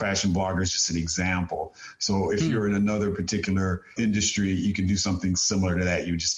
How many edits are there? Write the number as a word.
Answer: one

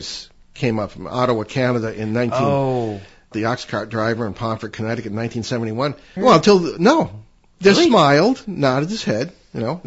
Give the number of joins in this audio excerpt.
two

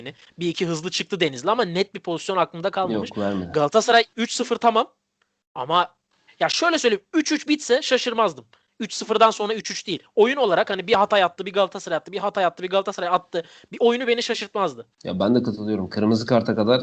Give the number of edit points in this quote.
one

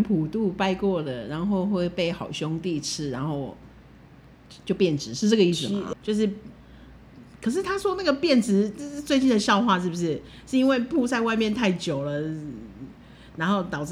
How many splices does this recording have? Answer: one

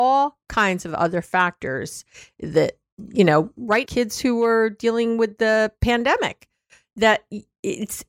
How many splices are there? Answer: one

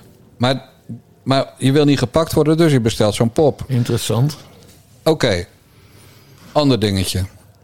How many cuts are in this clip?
one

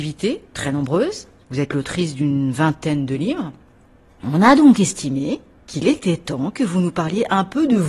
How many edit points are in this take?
zero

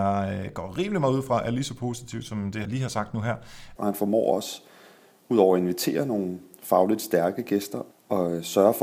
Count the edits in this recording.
three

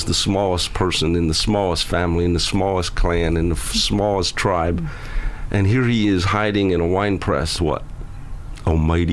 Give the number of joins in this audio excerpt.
one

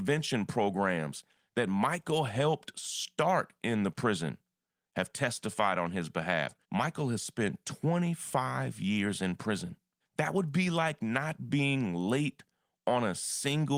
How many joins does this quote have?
two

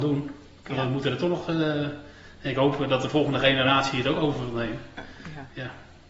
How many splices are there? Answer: zero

